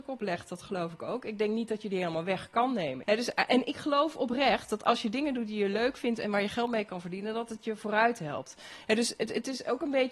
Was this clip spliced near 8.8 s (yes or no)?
no